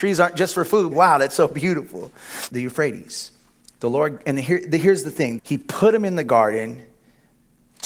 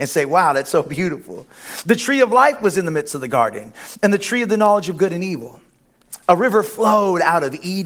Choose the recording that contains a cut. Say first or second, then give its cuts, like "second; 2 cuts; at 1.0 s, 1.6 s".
first; 3 cuts; at 0.9 s, 2.5 s, 5.4 s